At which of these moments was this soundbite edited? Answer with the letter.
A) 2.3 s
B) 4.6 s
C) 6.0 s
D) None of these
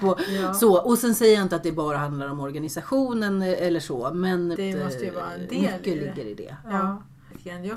B